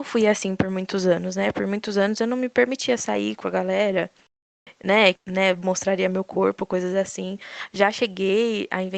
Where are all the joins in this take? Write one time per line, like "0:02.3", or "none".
0:05.1